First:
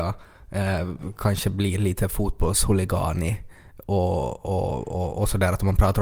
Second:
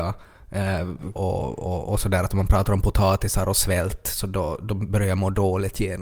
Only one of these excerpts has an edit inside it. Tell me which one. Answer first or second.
second